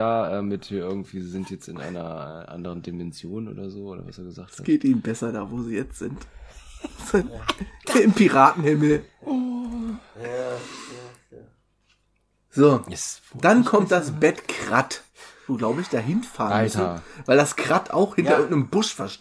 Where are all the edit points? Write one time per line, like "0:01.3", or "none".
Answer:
0:15.5